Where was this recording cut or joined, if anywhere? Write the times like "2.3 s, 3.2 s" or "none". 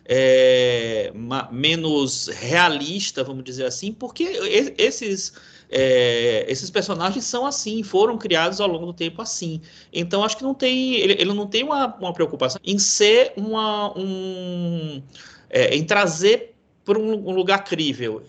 12.5 s